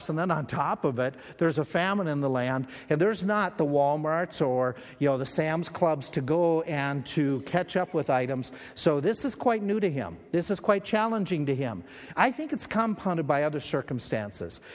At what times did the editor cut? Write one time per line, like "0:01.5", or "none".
none